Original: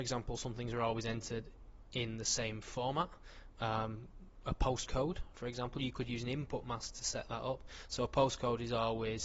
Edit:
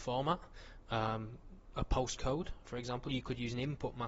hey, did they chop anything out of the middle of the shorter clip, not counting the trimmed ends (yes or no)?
no